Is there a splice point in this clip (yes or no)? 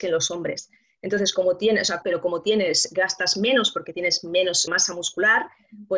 yes